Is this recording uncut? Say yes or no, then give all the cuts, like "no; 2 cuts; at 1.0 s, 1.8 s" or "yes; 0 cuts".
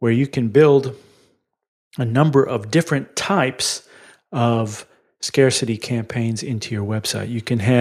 yes; 0 cuts